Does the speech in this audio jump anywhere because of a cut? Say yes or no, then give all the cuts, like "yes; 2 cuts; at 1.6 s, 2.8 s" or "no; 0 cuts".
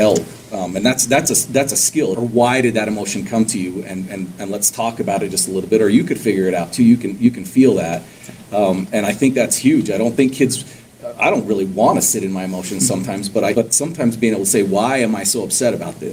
yes; 2 cuts; at 2.1 s, 13.5 s